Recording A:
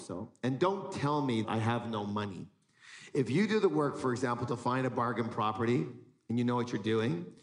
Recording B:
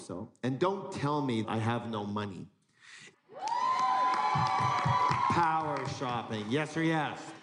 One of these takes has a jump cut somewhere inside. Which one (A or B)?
B